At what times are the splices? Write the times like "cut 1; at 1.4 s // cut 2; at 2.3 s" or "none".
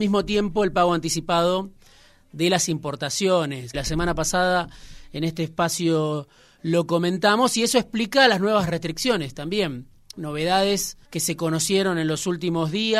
cut 1; at 3.7 s // cut 2; at 11.0 s